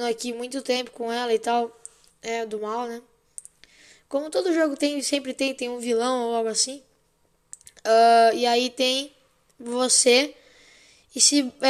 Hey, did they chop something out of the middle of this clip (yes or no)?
yes